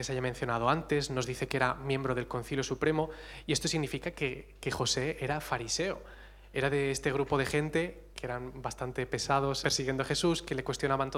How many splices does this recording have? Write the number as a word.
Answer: two